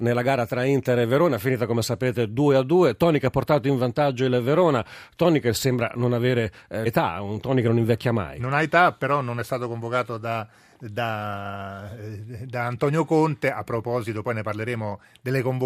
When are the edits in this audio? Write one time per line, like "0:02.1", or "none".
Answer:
0:06.9